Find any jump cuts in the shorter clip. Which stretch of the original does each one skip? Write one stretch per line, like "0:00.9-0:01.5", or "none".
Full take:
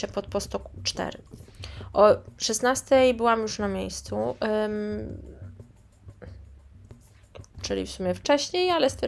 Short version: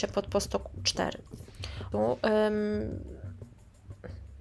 0:01.9-0:04.1

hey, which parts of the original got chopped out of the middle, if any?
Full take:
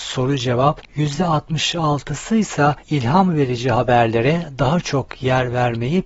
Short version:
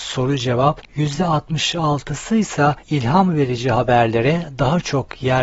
none

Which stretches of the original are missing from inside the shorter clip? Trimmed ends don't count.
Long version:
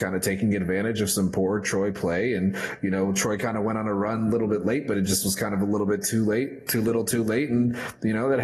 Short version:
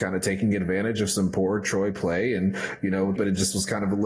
0:03.1-0:04.8

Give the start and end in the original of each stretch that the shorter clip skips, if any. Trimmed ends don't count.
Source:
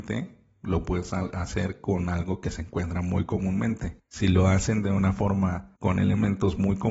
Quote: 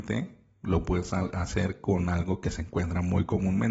none

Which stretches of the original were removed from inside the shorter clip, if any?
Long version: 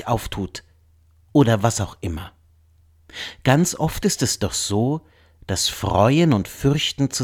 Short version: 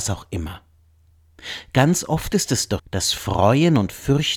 0:04.5-0:05.3

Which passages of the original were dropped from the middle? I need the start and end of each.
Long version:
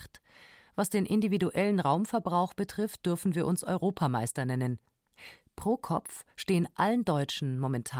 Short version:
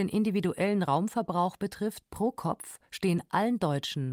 0:03.0-0:05.5

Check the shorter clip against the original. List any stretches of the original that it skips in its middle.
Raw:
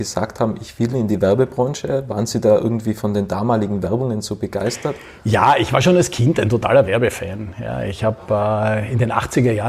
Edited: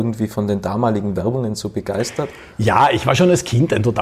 none

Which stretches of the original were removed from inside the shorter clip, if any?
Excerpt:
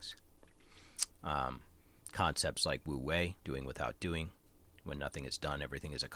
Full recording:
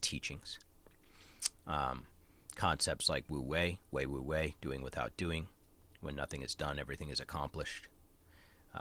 0:03.8-0:04.6

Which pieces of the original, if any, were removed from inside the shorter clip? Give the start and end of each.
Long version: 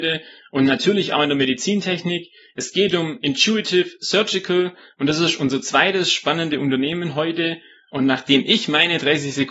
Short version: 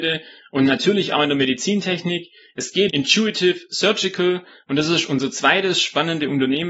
0:02.9-0:03.2

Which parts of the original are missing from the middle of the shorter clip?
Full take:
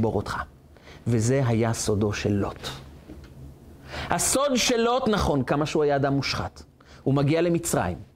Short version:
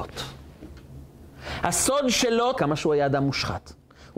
0:05.0-0:05.4

